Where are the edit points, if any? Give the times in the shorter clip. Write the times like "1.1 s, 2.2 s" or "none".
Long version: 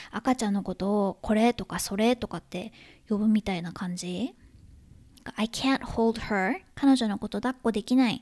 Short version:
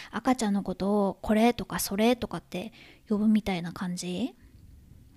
none